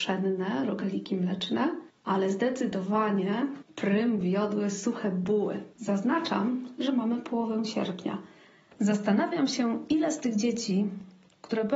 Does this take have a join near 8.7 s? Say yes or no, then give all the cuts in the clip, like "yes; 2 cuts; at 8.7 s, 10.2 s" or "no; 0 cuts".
yes; 2 cuts; at 5.8 s, 8.7 s